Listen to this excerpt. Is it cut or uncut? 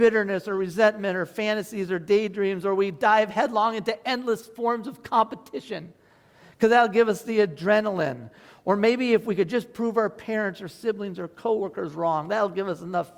uncut